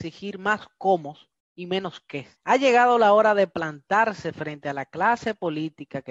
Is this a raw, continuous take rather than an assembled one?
no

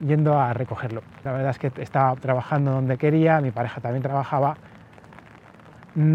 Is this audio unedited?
no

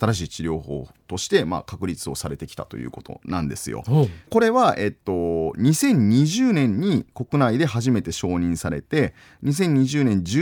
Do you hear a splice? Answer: yes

